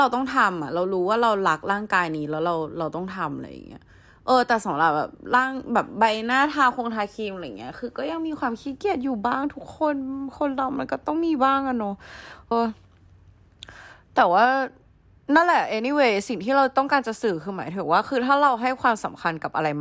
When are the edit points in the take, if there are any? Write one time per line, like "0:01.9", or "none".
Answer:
0:12.5